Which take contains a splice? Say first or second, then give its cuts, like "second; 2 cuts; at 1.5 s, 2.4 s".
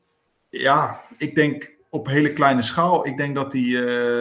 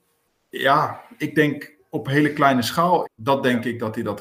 second; 1 cut; at 3.0 s